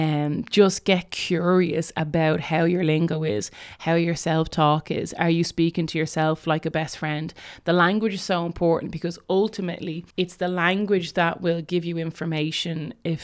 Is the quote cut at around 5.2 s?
no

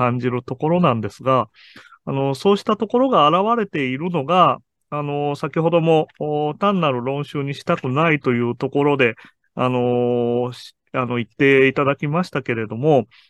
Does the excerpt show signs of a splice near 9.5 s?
no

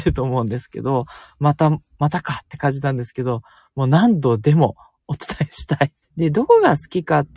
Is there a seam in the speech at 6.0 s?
yes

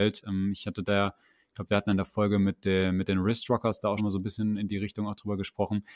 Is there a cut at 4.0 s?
yes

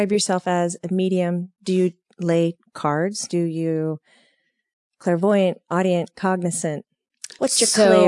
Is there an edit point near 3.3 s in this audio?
yes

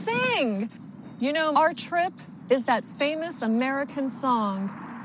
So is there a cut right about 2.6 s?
yes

